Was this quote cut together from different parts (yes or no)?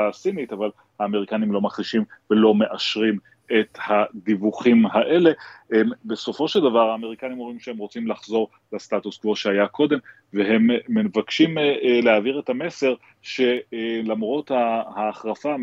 no